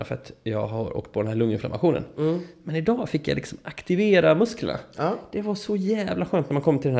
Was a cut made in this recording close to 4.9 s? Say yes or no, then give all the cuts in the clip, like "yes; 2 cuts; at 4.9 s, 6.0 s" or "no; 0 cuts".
no; 0 cuts